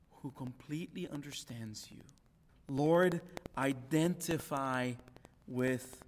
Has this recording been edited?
yes; 1 cut; at 2.5 s

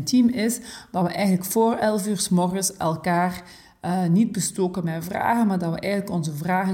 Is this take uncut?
yes; 0 cuts

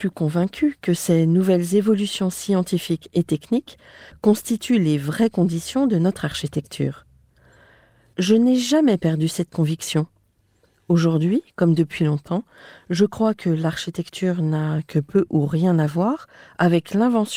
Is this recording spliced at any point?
no; 0 cuts

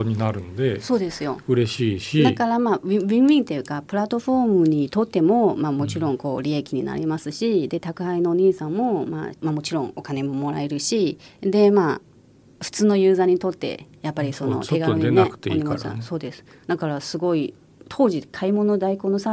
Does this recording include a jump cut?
yes; 1 cut; at 9.3 s

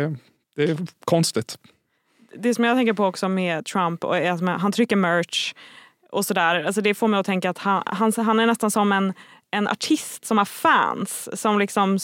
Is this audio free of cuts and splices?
yes; 0 cuts

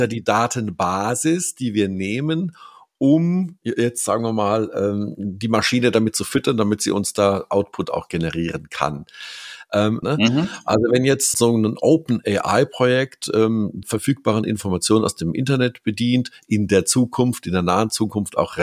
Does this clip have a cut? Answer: yes; 3 cuts; at 10.0 s, 11.3 s, 13.8 s

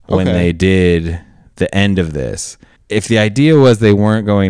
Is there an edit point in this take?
yes; 1 cut; at 2.8 s

